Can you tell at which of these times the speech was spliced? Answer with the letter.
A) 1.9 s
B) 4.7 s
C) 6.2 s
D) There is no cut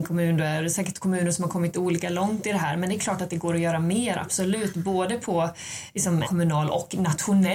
C